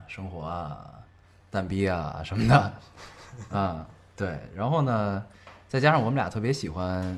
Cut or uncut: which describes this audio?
uncut